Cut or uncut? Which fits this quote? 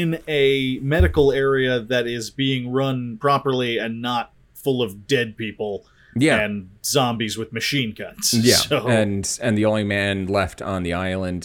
uncut